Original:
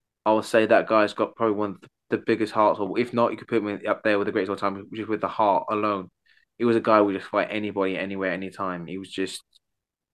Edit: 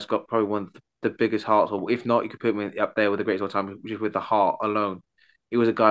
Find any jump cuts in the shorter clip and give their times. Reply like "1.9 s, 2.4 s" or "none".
none